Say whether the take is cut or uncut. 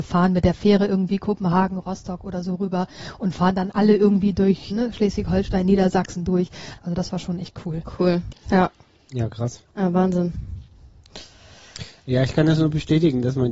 cut